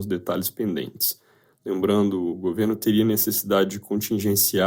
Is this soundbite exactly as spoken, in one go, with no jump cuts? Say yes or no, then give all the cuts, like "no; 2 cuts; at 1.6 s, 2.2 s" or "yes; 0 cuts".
no; 1 cut; at 1.5 s